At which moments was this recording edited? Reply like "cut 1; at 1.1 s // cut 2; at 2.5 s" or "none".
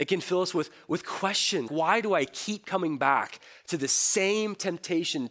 cut 1; at 1.7 s